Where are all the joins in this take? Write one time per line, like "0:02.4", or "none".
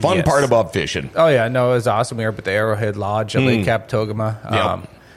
none